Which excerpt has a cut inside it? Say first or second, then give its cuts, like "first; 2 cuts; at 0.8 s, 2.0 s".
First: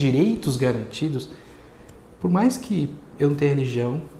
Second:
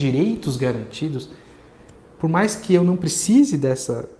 second; 1 cut; at 2.0 s